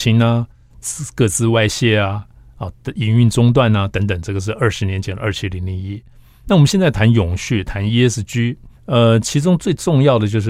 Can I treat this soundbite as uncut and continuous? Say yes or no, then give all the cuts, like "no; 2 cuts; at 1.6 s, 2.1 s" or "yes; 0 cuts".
no; 1 cut; at 8.7 s